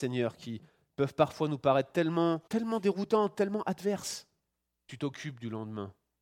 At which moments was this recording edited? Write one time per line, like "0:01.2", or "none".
0:02.5
0:04.8